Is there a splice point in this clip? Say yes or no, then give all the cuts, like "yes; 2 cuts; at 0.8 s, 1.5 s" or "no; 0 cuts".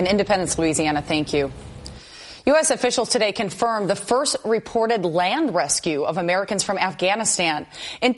no; 0 cuts